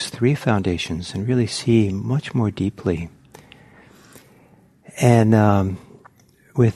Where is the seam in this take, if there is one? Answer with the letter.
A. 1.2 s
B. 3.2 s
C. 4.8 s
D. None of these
D